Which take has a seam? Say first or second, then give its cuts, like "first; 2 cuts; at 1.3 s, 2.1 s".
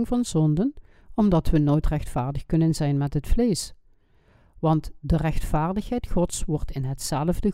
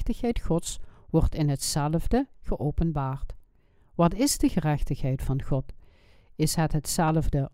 second; 1 cut; at 2.3 s